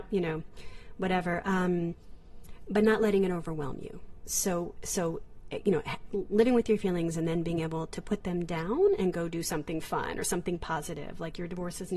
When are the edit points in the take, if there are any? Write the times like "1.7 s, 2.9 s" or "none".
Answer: none